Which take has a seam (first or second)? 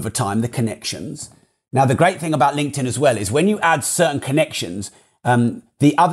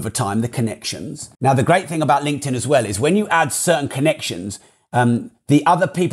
second